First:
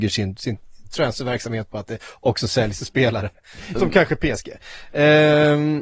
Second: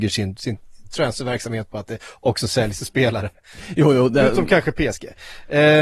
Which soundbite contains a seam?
first; 1 cut; at 3.8 s

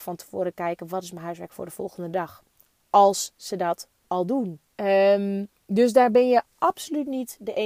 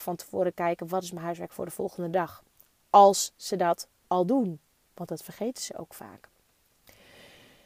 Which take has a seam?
first; 1 cut; at 4.7 s

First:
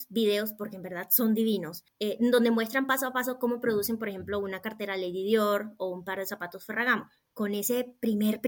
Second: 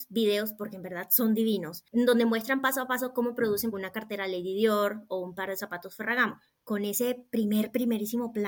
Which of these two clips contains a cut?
second; 2 cuts; at 1.9 s, 3.7 s

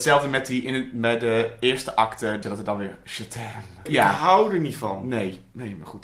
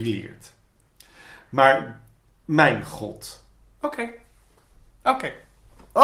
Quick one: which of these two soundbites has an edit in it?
first; 2 cuts; at 2.4 s, 3.9 s

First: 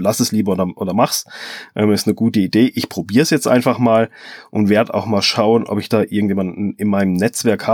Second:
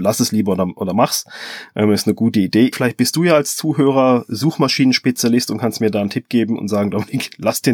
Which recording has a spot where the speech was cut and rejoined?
second; 1 cut; at 2.7 s

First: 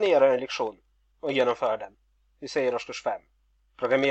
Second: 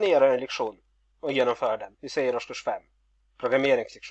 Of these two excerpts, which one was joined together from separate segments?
second; 1 cut; at 2.0 s

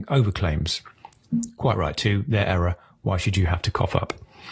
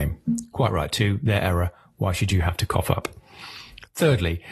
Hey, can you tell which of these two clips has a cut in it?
first; 1 cut; at 1.3 s

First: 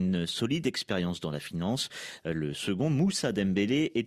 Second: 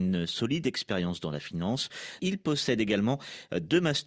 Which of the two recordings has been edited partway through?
second; 1 cut; at 2.2 s

